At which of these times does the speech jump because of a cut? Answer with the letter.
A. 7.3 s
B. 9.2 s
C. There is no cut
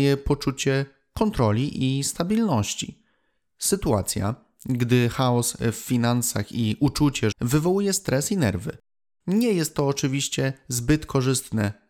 A